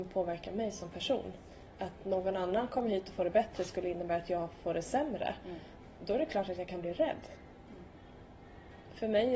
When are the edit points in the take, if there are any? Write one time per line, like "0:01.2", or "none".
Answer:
none